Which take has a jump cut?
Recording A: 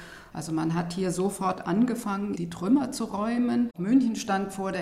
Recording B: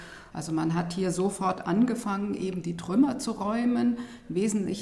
A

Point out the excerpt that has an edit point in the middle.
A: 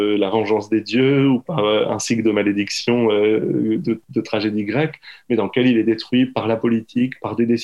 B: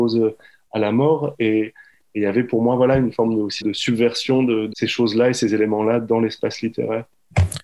B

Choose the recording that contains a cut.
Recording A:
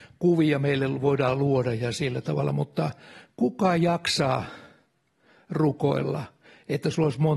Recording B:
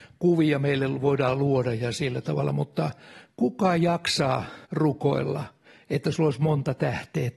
B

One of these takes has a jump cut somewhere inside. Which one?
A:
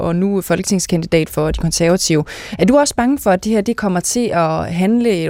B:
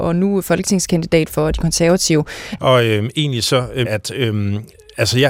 B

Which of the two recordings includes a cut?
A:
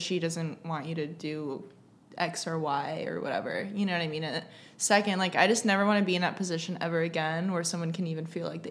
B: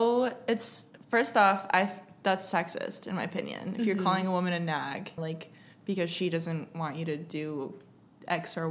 B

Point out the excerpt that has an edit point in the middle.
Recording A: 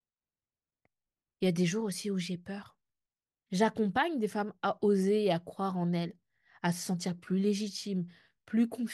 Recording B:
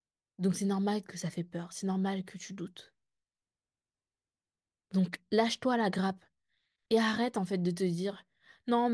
A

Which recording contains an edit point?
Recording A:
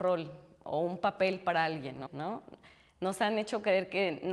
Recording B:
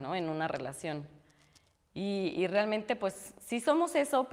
A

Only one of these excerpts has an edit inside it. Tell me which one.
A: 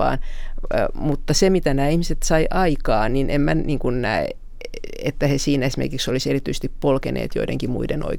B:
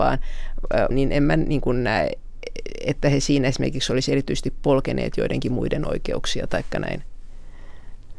B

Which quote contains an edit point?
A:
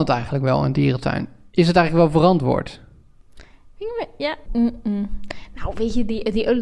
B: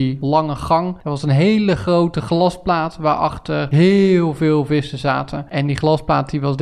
A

